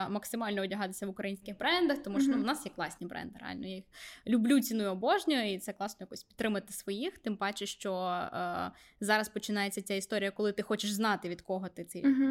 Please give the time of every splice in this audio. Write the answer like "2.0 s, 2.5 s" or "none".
none